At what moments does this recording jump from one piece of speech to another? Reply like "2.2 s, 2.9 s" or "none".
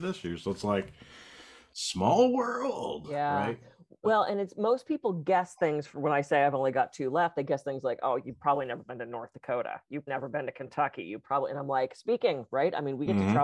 10.1 s